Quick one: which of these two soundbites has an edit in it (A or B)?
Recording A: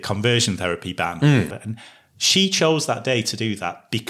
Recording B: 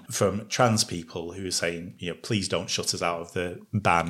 A